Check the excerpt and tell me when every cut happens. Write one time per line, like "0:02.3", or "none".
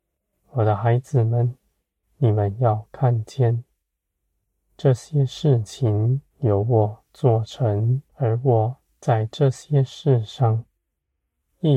0:02.0
0:06.3
0:08.1